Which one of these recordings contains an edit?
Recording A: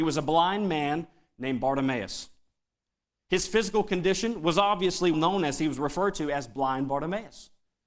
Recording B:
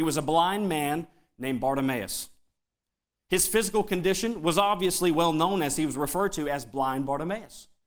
A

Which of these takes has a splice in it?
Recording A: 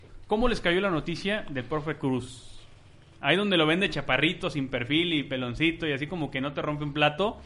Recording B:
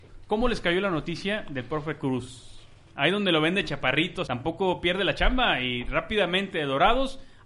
B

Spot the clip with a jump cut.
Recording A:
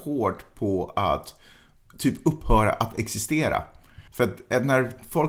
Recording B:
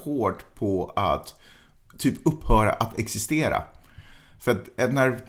A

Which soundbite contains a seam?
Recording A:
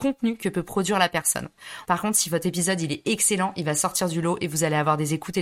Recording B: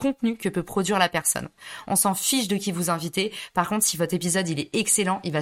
A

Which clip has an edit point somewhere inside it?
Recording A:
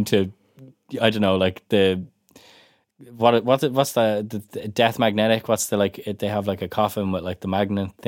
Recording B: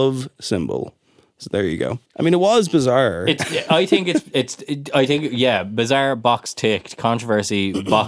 B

